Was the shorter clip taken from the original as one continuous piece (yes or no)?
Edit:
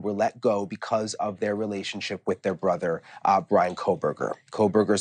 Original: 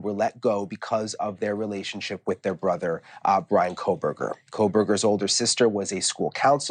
yes